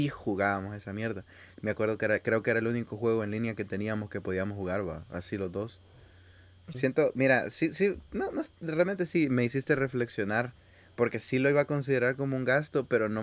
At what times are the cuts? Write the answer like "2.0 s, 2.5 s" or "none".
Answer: 6.7 s